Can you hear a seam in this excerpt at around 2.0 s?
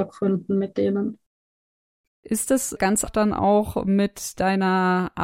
yes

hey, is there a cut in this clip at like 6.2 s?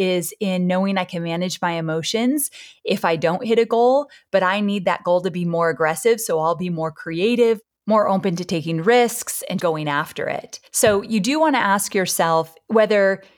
no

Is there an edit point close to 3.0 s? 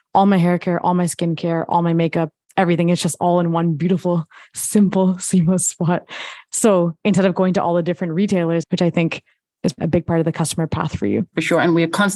no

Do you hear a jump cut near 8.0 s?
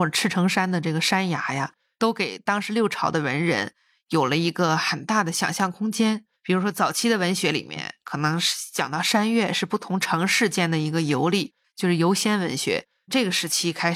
no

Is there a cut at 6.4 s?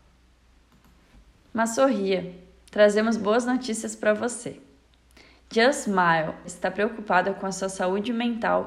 yes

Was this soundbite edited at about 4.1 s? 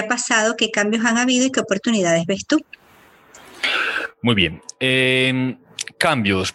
no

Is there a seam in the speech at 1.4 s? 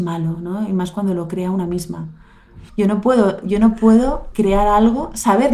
no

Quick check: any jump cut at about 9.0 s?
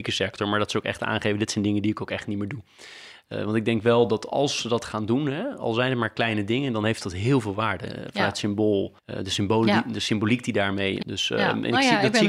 yes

